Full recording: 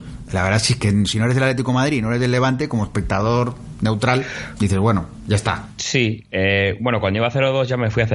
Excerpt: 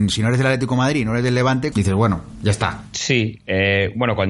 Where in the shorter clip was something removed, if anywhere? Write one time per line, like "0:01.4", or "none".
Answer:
0:01.7